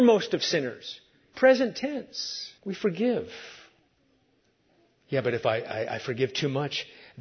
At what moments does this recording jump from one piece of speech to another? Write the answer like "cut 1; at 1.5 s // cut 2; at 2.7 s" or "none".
cut 1; at 2.6 s